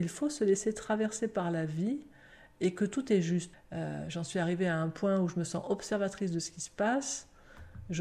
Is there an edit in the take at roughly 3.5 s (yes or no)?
yes